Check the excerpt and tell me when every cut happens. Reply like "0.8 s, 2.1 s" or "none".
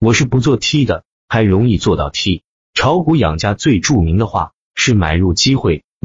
1.1 s, 2.5 s